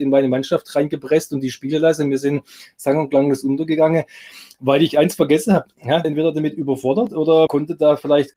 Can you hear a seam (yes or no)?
yes